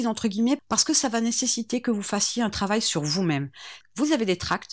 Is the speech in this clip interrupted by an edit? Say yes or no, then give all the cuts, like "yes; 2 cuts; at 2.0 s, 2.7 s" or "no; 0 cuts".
yes; 1 cut; at 3.8 s